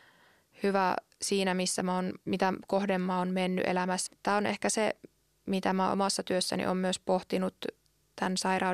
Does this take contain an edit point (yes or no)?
yes